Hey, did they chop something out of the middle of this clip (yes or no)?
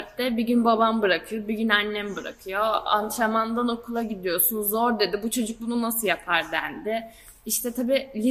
no